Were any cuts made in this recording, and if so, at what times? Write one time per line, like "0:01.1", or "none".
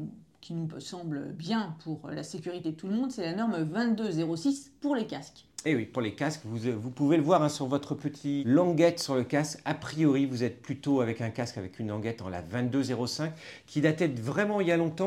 0:08.4